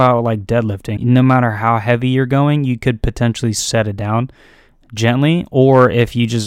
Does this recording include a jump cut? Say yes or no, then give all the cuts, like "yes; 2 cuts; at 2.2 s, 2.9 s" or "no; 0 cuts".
yes; 1 cut; at 1.0 s